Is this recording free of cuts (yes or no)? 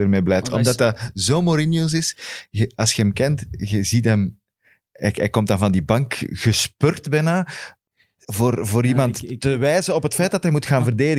yes